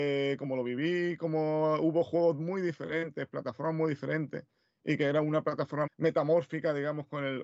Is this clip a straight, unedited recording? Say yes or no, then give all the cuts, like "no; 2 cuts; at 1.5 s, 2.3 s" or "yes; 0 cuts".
no; 1 cut; at 5.9 s